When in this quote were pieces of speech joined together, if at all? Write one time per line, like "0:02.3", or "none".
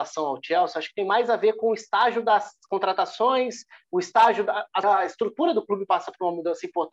0:04.8